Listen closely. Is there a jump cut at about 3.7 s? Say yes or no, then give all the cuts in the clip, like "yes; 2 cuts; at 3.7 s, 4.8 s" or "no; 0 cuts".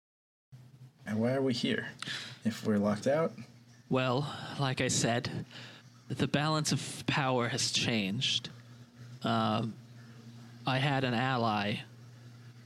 no; 1 cut; at 1.1 s